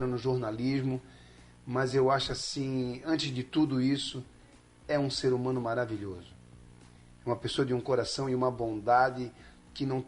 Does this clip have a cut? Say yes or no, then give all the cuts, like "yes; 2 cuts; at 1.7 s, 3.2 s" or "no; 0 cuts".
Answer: no; 0 cuts